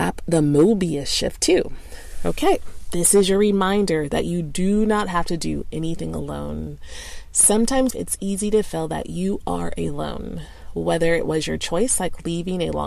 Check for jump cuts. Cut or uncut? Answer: cut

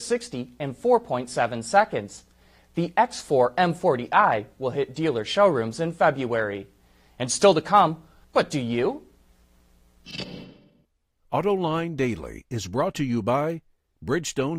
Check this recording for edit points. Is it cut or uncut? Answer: cut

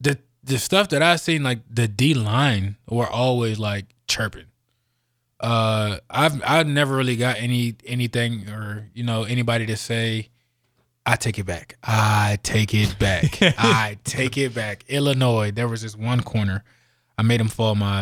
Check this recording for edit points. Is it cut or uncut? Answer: uncut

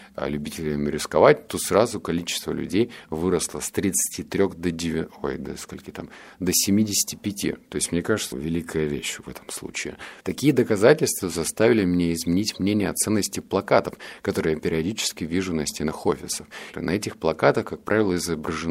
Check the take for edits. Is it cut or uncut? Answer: cut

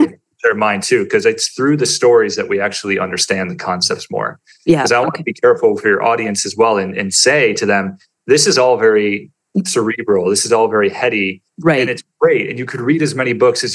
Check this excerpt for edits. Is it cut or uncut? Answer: uncut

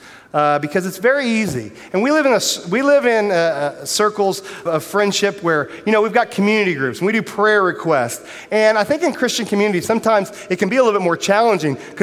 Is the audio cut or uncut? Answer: cut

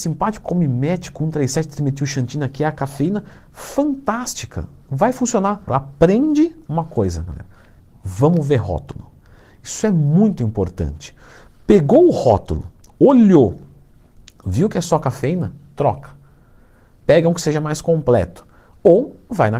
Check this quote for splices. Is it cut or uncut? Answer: cut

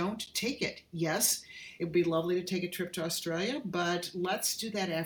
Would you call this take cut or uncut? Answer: uncut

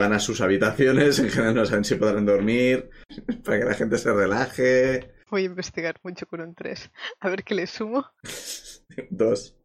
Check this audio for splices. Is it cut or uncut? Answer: cut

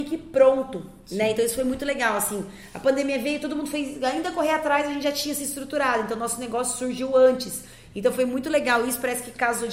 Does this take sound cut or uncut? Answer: uncut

